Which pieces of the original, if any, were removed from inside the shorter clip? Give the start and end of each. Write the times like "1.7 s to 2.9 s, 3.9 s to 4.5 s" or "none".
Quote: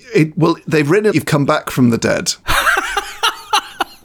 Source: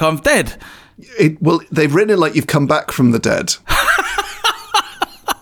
2.2 s to 2.3 s